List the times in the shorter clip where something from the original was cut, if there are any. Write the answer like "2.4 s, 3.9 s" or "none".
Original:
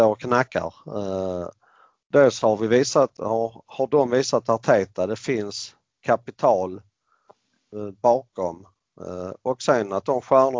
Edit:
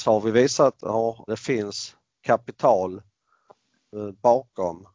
1.3 s